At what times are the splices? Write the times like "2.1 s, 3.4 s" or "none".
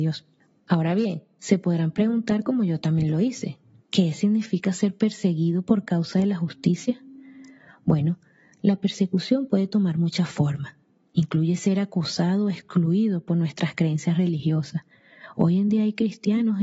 none